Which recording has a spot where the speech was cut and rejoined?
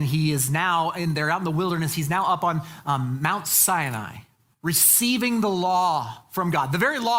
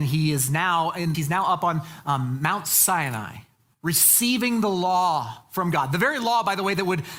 second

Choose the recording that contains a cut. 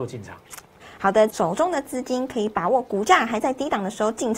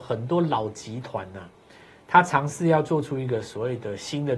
first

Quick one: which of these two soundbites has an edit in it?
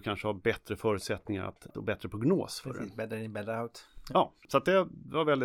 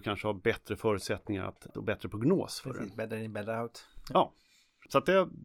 first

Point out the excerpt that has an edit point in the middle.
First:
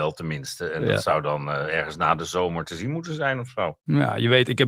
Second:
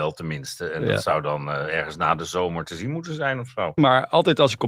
second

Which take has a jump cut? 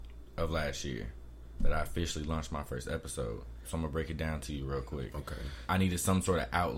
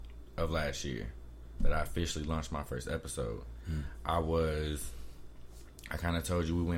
first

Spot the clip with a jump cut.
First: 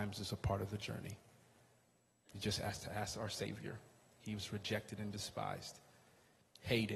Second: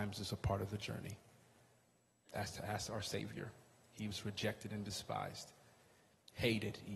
second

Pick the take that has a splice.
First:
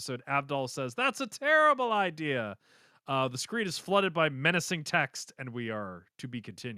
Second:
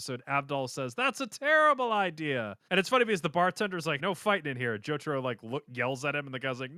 second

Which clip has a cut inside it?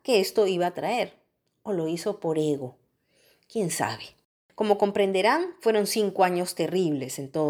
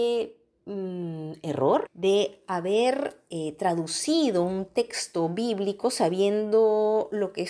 second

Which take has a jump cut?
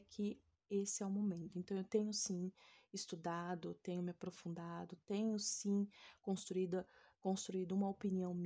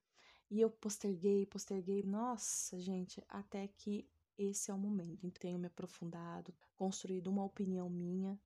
second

